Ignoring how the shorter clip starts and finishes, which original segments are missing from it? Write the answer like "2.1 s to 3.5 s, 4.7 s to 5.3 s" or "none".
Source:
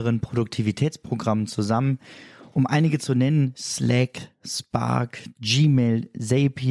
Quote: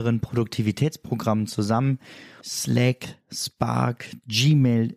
2.4 s to 3.5 s